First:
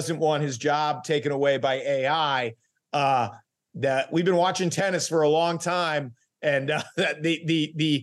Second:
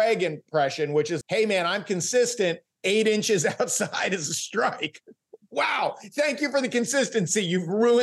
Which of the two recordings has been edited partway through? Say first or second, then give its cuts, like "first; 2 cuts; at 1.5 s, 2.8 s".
second; 1 cut; at 1.2 s